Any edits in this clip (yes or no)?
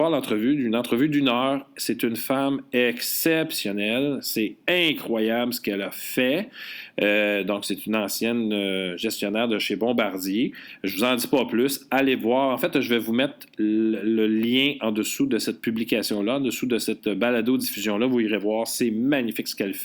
no